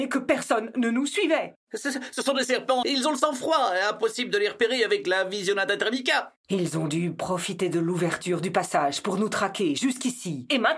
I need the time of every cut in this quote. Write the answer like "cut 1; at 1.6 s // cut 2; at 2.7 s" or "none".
cut 1; at 2.8 s